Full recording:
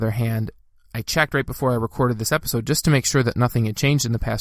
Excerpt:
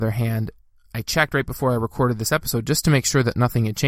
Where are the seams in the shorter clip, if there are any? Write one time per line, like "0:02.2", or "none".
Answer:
none